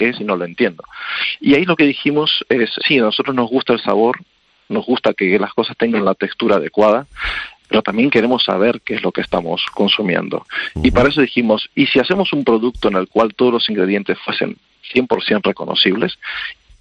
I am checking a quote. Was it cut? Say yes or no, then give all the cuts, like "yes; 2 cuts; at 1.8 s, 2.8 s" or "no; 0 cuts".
yes; 1 cut; at 2.8 s